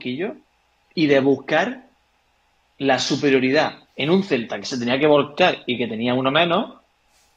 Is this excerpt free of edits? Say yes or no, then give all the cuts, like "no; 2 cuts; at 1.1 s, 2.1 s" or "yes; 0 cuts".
no; 1 cut; at 3.9 s